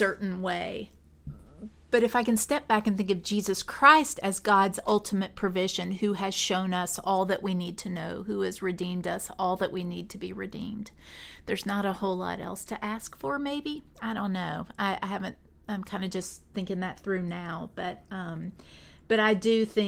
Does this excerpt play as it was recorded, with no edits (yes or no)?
yes